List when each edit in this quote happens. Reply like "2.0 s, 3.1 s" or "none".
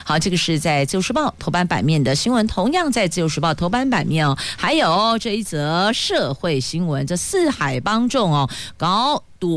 none